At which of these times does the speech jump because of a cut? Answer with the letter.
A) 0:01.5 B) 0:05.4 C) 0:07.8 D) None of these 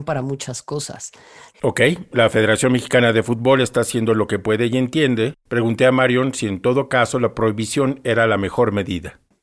A